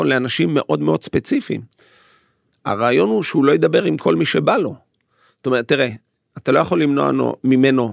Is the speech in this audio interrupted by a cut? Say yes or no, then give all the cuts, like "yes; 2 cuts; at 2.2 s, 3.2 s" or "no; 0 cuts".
no; 0 cuts